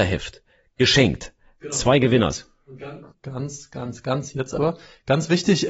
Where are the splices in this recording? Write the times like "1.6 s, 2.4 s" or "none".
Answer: 3.1 s